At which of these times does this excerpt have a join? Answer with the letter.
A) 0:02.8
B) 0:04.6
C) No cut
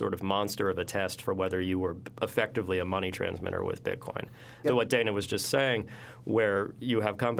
B